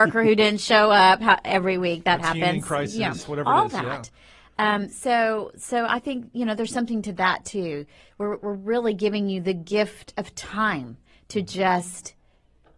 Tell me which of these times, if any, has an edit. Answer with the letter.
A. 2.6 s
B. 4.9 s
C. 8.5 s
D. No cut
D